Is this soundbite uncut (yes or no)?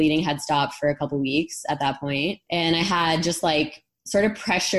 no